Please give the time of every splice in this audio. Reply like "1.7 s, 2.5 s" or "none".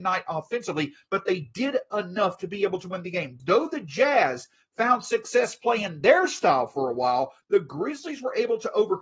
3.4 s, 7.4 s